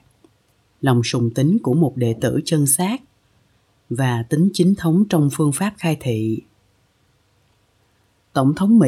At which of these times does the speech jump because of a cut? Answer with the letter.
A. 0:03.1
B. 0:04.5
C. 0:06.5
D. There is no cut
D